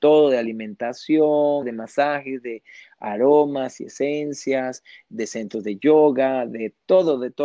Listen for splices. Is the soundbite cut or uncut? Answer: cut